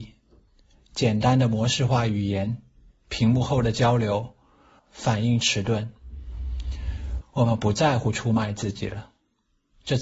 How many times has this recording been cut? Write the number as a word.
two